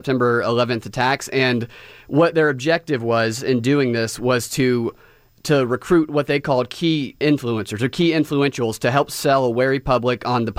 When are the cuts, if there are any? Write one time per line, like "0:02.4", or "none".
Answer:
none

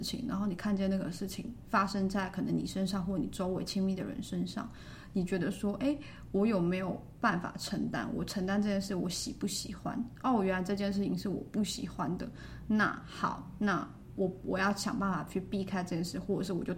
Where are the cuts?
none

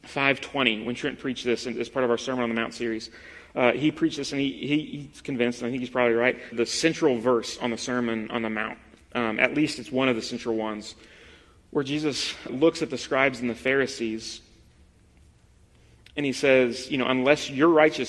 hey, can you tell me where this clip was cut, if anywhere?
0:06.5
0:12.5

